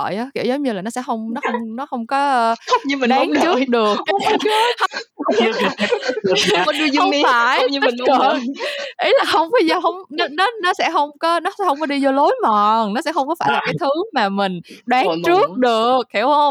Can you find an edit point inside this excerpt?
no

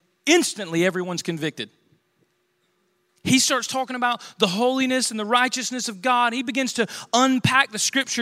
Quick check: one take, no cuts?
yes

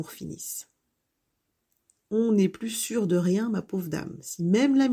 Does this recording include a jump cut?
no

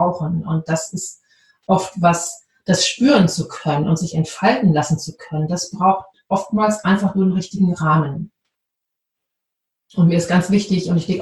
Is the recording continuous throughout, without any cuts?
yes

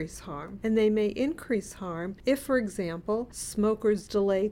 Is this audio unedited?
yes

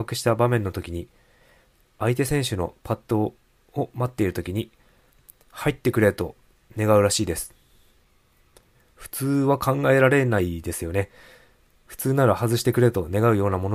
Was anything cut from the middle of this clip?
no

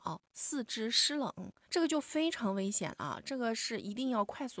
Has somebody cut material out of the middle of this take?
yes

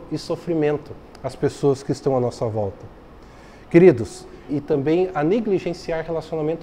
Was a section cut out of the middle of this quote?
yes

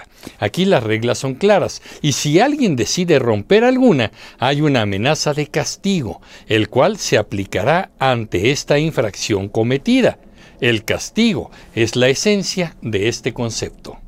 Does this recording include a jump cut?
no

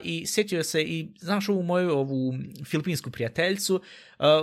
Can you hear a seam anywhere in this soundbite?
no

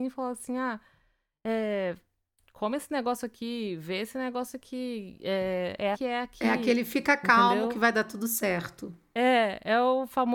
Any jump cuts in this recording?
yes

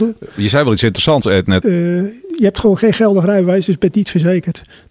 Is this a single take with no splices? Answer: no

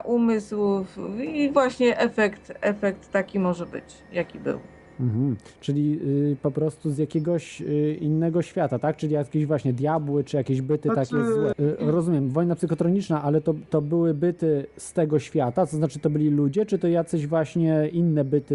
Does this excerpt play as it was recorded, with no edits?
no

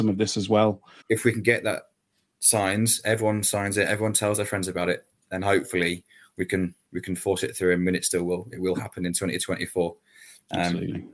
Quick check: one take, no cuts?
no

